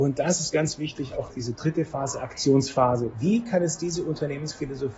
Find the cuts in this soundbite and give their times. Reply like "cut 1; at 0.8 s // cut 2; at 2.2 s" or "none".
cut 1; at 1.3 s // cut 2; at 3.1 s